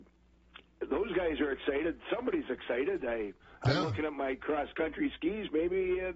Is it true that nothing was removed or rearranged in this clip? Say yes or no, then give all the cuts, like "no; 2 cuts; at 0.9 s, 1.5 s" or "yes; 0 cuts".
yes; 0 cuts